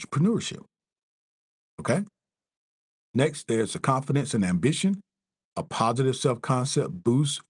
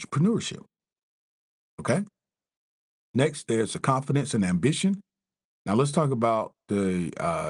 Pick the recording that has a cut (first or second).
second